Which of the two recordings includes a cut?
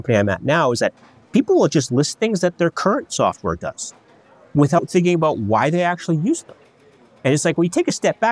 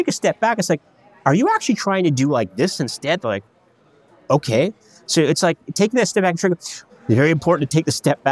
second; 2 cuts; at 3.2 s, 6.9 s

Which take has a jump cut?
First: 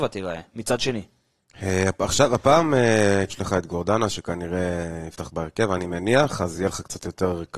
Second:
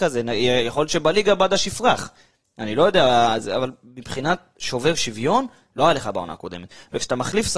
first; 1 cut; at 3.3 s

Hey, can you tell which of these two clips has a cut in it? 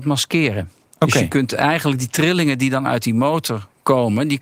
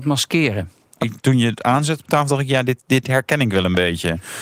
second; 1 cut; at 1.0 s

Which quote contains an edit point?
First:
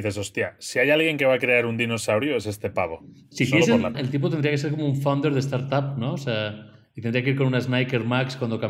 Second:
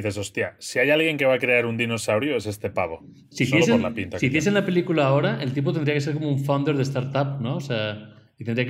first; 1 cut; at 3.9 s

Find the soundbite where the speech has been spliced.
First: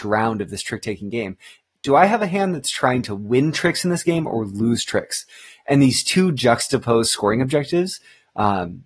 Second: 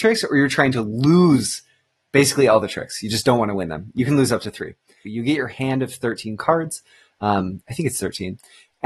second; 1 cut; at 5.0 s

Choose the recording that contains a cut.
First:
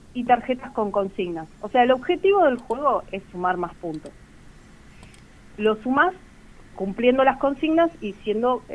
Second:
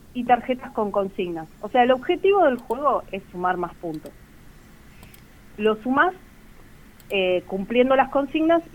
first; 1 cut; at 6.7 s

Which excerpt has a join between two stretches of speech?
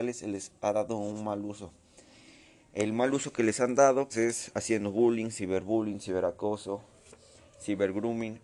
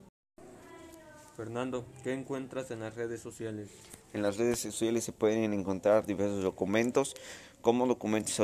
first; 1 cut; at 4.1 s

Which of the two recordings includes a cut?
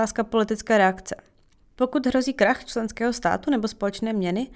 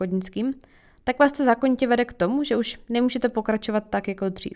first; 1 cut; at 1.6 s

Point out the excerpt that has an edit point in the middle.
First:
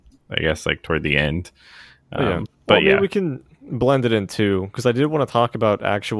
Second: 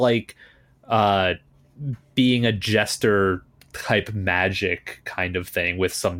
first; 1 cut; at 2.5 s

